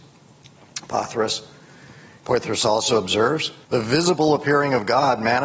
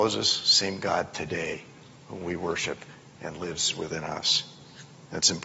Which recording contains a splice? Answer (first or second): first